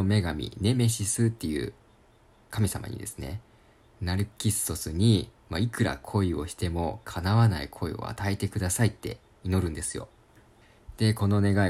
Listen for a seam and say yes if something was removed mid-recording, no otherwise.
no